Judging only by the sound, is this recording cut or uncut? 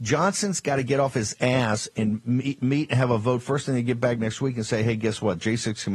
uncut